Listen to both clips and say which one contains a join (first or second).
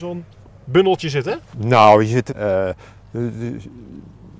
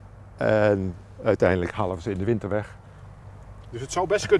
first